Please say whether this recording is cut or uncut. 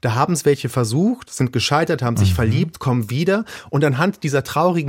uncut